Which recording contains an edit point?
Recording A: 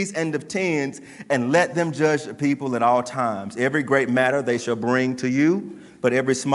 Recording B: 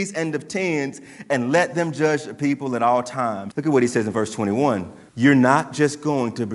B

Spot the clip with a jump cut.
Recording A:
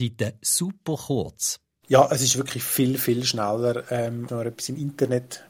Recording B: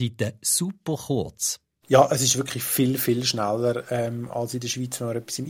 A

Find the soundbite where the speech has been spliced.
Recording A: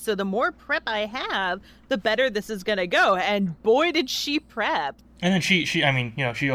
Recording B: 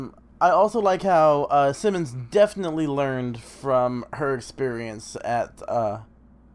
A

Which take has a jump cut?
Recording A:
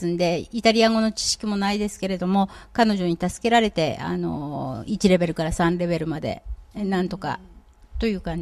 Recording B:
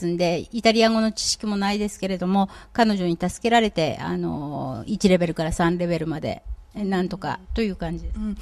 B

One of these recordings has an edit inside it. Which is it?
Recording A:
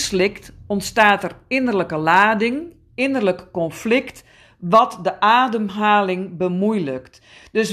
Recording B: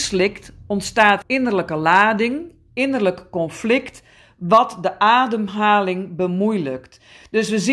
B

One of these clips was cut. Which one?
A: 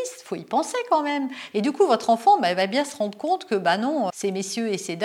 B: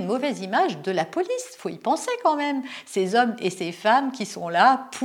A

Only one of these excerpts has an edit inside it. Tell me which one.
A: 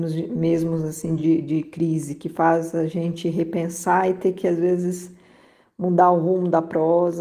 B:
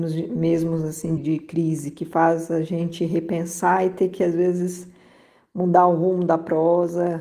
B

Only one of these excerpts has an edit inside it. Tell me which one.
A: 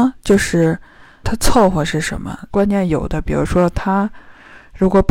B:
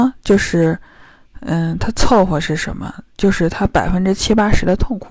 A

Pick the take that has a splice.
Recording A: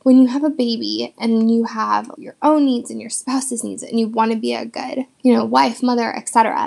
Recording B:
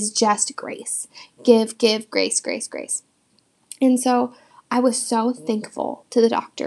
A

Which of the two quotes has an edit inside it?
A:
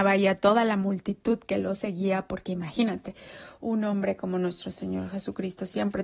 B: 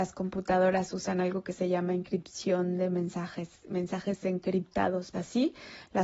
B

